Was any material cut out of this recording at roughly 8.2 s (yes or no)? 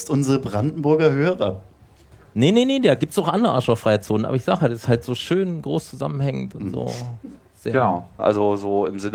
yes